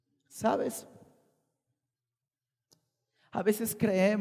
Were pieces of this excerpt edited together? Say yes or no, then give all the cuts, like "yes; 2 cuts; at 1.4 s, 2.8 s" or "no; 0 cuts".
no; 0 cuts